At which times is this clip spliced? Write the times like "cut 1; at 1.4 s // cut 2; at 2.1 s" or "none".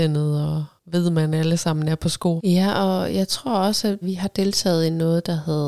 cut 1; at 2.4 s // cut 2; at 4.0 s